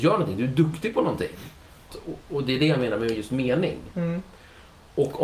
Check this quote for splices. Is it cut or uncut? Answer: cut